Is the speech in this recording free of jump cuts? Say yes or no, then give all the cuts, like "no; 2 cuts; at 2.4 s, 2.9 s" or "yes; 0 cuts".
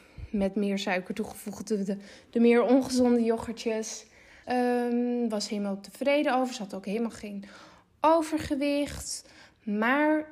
no; 1 cut; at 4.4 s